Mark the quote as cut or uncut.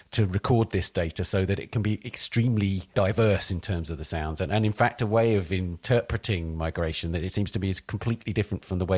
uncut